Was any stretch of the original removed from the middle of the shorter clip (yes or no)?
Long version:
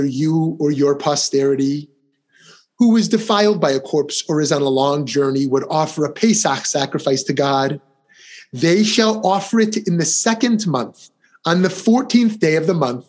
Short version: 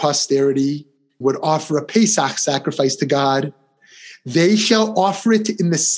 yes